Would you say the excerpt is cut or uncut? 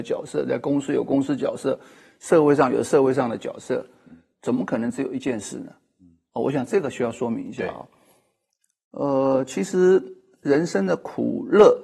uncut